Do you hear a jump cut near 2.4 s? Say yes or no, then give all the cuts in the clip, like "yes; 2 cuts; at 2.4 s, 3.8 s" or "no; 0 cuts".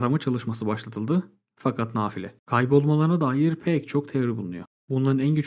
yes; 1 cut; at 2.4 s